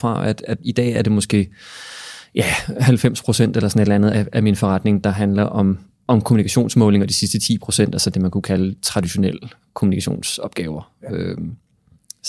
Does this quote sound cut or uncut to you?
cut